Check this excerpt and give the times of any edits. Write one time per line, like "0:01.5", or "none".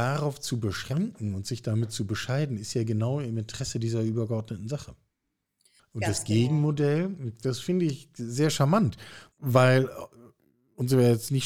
0:05.8